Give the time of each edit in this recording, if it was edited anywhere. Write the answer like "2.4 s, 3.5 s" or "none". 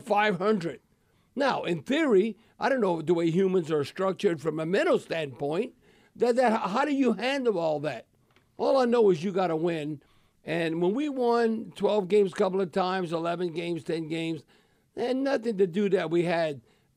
none